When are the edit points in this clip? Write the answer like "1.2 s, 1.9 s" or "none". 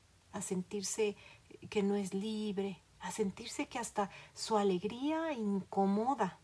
2.9 s